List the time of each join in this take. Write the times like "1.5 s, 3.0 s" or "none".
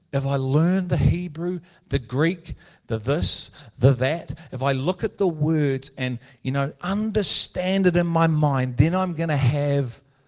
none